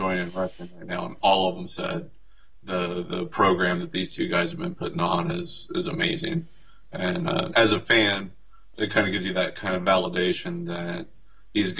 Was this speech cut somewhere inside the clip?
yes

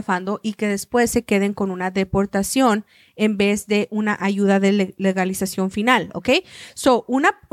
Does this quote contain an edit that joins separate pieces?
no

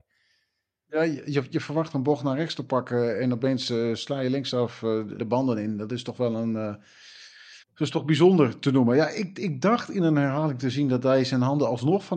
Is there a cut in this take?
yes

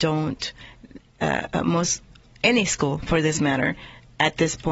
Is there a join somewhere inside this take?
no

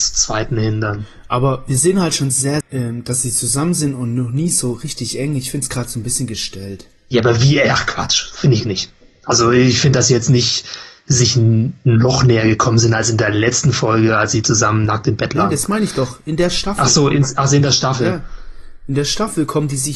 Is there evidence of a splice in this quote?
yes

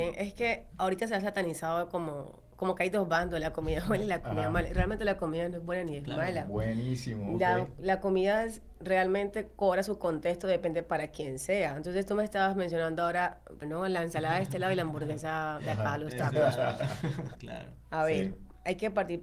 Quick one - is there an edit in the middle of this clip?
yes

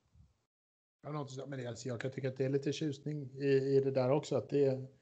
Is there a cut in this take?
no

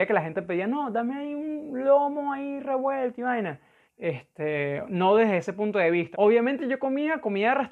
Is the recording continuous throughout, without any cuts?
no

